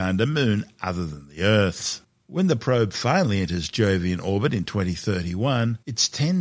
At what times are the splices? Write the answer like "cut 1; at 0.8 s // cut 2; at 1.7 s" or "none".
cut 1; at 2.2 s